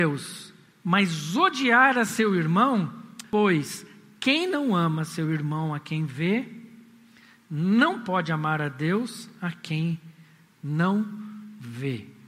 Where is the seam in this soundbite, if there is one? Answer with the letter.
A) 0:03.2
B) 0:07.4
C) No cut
A